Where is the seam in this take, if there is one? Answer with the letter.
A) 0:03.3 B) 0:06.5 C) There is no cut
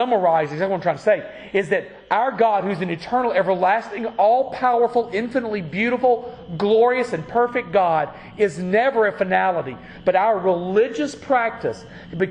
C